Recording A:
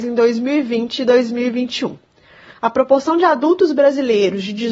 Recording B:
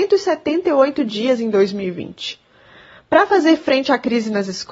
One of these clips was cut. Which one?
A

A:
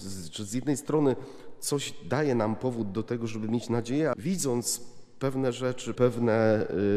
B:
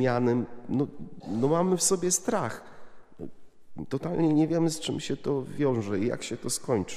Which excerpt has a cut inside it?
A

